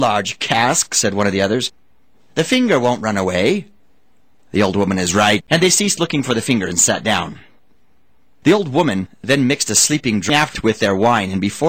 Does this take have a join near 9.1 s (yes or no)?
no